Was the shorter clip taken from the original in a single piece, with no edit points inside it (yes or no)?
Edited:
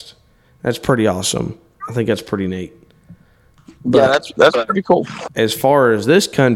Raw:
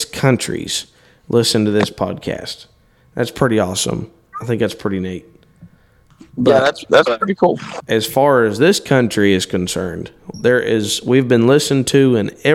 yes